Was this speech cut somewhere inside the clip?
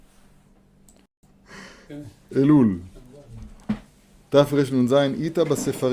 yes; 1 cut; at 1.9 s

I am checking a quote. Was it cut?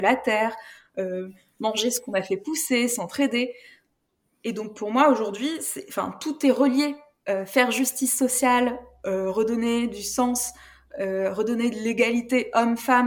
yes; 1 cut; at 4.3 s

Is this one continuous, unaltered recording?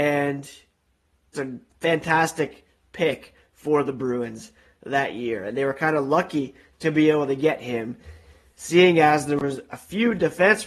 no; 1 cut; at 1.3 s

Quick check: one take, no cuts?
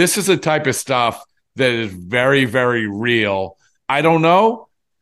no; 1 cut; at 3.8 s

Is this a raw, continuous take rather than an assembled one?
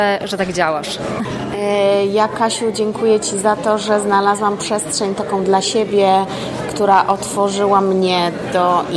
yes; 0 cuts

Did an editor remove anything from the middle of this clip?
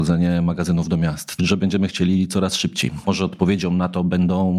yes; 1 cut; at 3.0 s

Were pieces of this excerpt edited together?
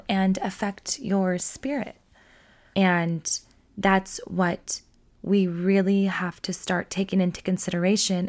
yes; 1 cut; at 2.7 s

